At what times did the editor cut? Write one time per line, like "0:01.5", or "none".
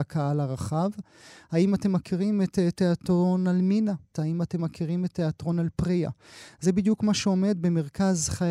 0:04.1